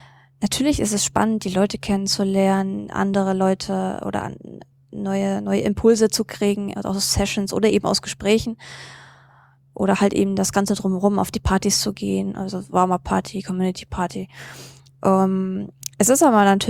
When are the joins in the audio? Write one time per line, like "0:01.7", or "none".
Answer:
none